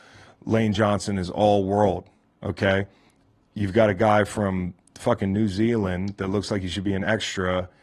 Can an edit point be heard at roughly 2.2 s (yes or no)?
no